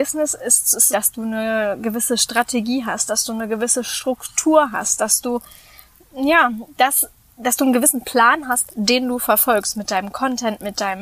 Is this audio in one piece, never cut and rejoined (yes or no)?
no